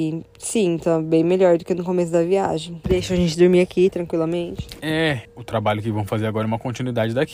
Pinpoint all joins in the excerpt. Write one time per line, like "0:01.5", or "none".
0:02.8
0:05.3